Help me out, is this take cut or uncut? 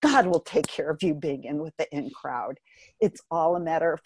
uncut